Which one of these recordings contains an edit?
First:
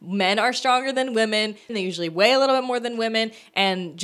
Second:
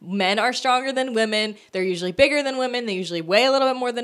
first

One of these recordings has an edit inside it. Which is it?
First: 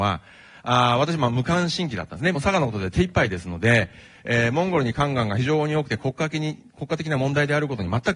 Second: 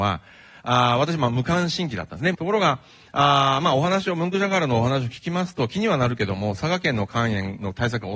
second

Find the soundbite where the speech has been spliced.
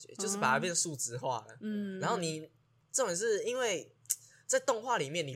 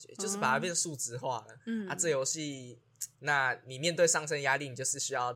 second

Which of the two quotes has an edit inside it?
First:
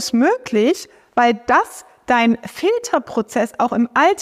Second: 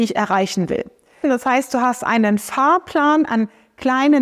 second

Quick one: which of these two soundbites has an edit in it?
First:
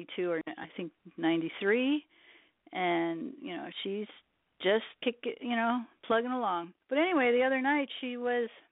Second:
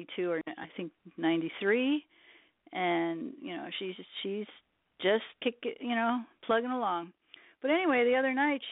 first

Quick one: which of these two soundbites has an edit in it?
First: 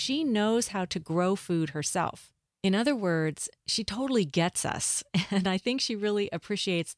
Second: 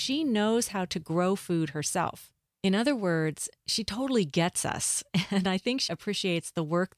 second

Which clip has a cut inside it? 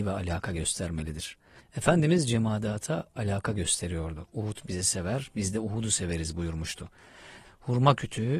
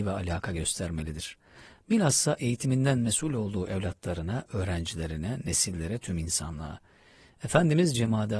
first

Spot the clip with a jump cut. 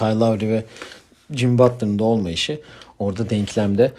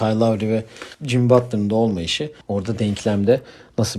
second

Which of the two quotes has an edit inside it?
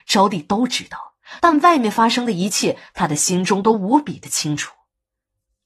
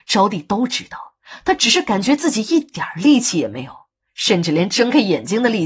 first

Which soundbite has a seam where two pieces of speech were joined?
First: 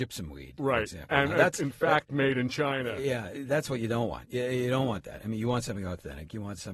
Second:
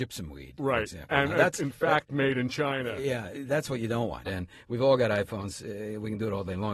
second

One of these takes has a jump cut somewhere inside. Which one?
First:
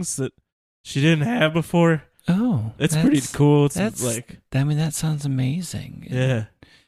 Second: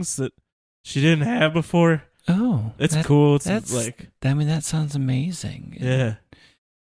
second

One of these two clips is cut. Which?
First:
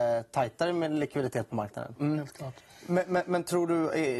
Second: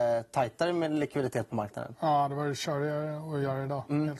first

